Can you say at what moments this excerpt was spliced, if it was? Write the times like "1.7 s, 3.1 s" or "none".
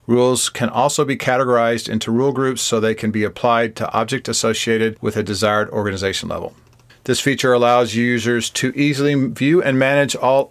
6.9 s